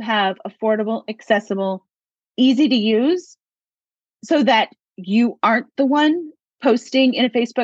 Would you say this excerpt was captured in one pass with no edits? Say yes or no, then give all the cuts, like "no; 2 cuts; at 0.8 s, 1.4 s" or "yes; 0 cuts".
yes; 0 cuts